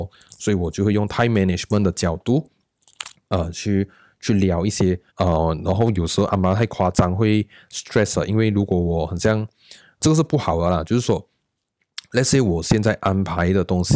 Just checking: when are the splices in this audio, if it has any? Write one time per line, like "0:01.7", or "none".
0:05.1
0:10.0